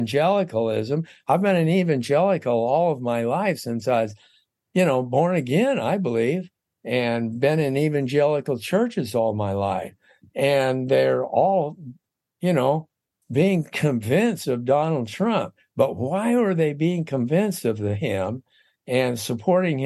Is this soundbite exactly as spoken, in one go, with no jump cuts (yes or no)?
yes